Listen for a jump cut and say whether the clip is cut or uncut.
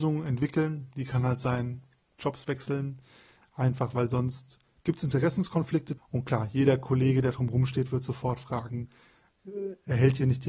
cut